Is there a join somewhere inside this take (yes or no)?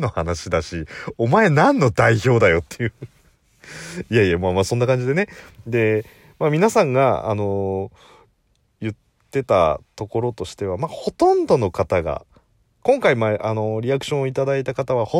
no